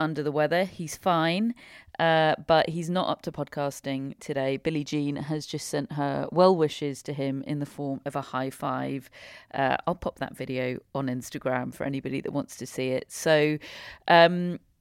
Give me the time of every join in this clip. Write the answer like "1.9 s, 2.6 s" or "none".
none